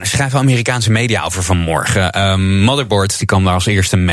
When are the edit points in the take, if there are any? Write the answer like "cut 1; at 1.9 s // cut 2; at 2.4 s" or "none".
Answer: cut 1; at 3.2 s